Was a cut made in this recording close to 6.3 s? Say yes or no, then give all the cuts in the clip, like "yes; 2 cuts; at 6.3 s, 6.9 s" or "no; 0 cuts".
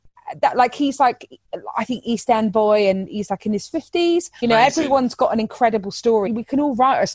yes; 2 cuts; at 4.4 s, 6.3 s